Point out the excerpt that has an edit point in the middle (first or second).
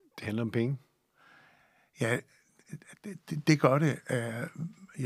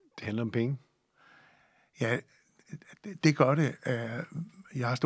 second